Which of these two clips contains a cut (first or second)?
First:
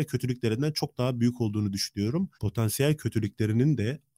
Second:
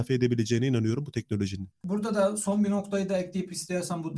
first